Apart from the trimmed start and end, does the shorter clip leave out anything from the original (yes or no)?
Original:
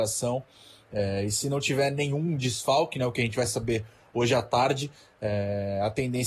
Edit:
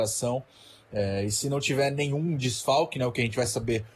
no